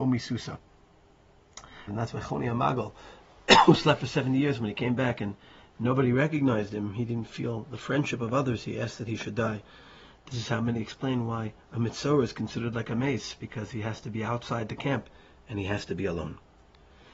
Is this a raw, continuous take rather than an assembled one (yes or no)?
no